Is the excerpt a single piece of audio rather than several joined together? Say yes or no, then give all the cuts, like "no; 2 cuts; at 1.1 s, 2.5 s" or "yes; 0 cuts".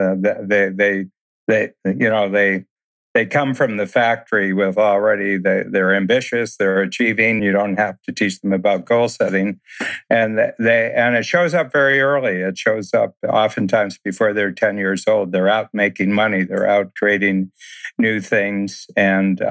no; 1 cut; at 7.4 s